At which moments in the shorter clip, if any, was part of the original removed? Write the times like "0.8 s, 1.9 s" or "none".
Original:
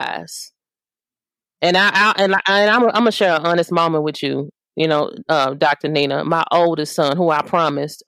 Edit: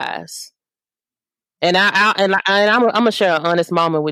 none